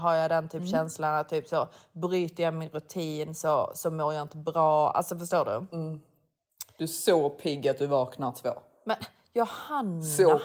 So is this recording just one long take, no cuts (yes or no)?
yes